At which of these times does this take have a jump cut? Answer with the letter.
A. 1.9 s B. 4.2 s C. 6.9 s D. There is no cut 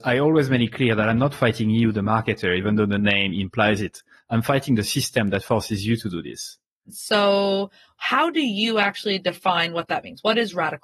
C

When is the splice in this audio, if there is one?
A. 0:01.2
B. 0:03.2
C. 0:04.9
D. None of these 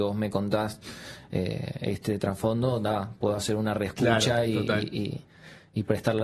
D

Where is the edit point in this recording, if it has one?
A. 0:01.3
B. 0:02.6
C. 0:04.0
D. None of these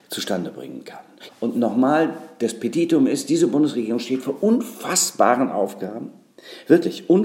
A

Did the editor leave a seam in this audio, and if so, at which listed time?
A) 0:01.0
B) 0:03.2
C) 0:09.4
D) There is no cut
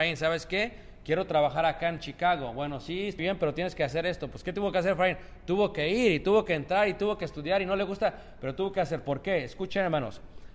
B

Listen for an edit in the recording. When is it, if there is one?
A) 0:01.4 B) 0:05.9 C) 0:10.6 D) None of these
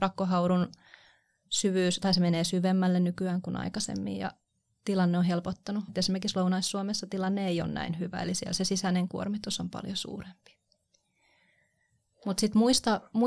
B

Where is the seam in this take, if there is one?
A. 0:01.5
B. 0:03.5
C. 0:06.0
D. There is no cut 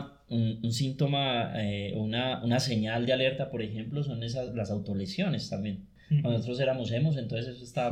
D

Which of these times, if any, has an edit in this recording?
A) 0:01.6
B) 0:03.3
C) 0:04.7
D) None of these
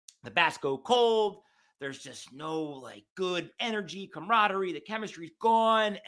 D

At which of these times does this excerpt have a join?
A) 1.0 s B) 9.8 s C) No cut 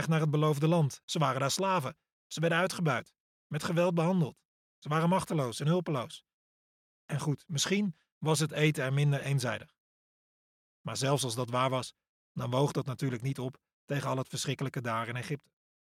A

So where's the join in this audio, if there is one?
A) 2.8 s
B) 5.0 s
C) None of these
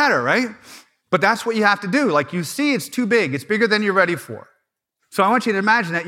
B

